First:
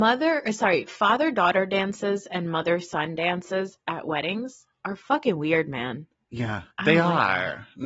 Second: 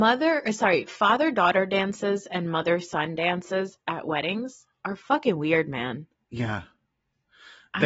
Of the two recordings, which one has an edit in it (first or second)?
first